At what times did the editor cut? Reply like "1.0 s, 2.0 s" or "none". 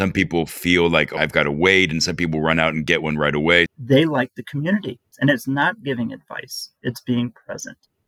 1.2 s, 3.7 s, 5.1 s